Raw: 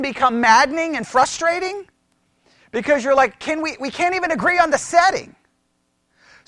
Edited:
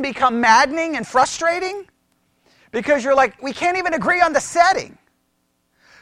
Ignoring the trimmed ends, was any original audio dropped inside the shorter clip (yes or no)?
yes